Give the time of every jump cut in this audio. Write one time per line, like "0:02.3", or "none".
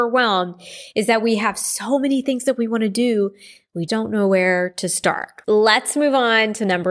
0:03.9
0:05.4